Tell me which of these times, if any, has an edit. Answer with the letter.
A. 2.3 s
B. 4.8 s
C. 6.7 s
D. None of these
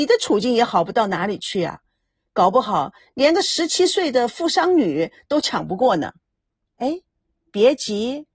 C